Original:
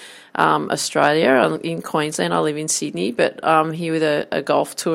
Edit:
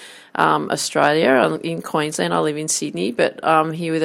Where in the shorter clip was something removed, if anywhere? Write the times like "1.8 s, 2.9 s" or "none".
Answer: none